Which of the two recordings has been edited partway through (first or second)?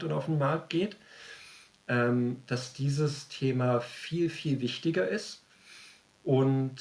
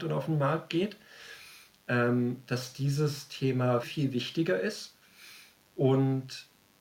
second